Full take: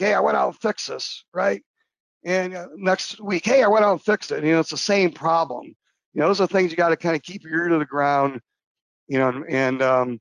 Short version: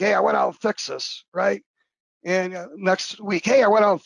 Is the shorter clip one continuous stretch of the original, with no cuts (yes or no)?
yes